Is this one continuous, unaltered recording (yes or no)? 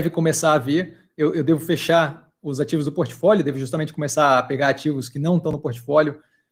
yes